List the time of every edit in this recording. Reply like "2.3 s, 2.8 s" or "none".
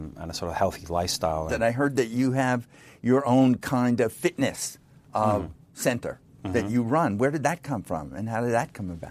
1.5 s